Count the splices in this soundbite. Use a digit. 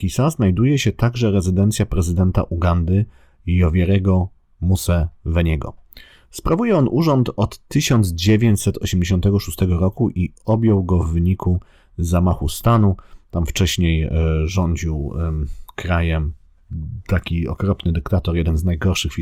0